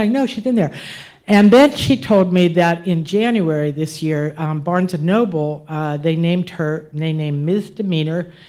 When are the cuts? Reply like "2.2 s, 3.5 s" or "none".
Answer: none

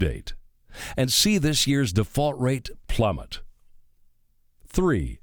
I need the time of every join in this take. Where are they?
none

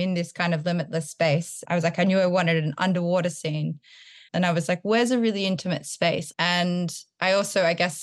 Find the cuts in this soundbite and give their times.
1.6 s, 4.3 s, 6.3 s

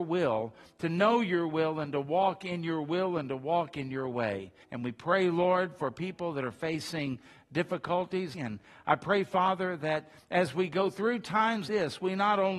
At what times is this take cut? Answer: 4.6 s, 8.3 s, 11.7 s

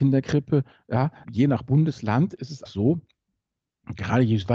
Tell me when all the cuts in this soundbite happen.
1.2 s, 2.6 s

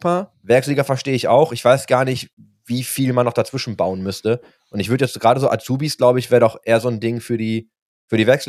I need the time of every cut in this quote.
none

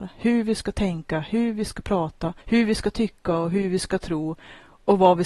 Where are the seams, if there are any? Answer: 2.4 s

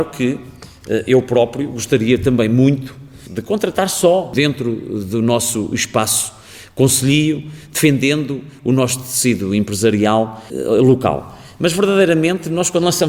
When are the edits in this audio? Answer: 3.3 s

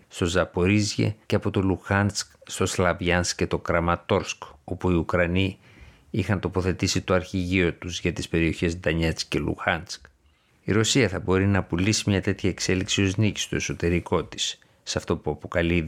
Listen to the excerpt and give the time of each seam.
1.2 s, 10.5 s

